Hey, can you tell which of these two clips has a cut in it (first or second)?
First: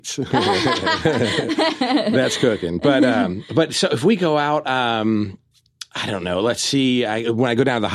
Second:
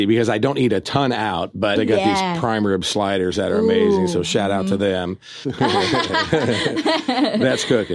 second